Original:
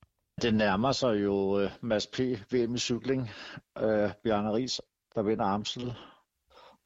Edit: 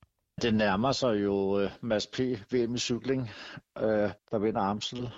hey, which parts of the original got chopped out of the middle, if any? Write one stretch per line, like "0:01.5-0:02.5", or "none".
0:04.2-0:05.0